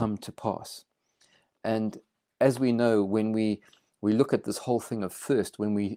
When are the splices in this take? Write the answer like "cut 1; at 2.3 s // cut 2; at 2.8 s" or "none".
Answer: none